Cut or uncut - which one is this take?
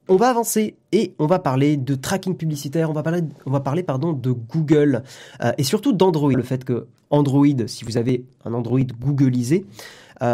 cut